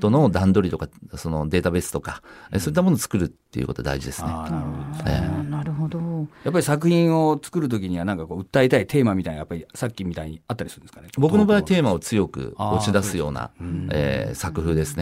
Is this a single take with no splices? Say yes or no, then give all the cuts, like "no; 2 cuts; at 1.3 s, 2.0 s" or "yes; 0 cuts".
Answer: yes; 0 cuts